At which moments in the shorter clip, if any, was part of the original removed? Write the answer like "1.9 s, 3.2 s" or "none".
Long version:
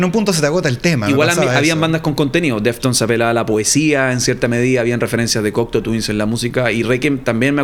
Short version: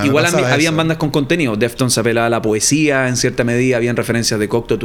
none